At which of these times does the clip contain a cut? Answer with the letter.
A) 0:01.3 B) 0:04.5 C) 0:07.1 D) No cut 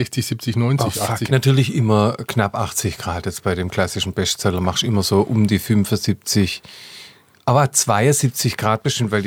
A